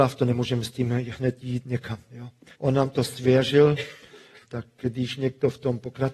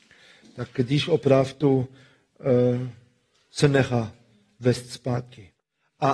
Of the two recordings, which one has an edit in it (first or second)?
first